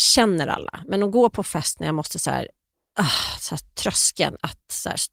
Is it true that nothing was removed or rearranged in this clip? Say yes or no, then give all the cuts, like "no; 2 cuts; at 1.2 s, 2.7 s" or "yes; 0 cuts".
yes; 0 cuts